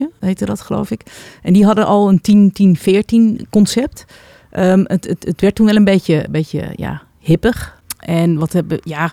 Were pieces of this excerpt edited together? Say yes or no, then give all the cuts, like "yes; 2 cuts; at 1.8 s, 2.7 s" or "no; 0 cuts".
no; 0 cuts